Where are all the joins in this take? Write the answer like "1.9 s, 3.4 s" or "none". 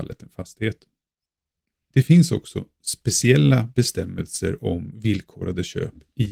none